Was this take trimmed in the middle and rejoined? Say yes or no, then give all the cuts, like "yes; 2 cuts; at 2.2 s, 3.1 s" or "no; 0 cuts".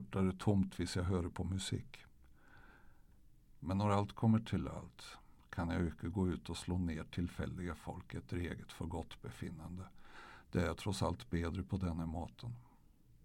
yes; 1 cut; at 3.5 s